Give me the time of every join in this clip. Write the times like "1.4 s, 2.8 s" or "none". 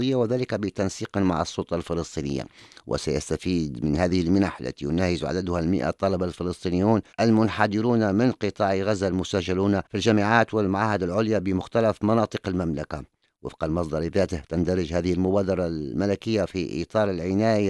7.1 s, 9.9 s